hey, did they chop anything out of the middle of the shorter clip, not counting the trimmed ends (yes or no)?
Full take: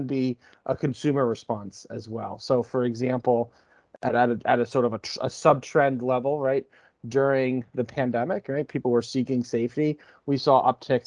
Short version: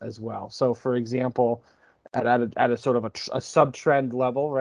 no